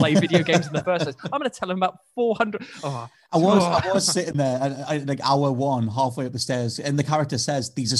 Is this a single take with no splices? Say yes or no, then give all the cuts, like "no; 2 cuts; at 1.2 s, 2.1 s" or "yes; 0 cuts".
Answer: yes; 0 cuts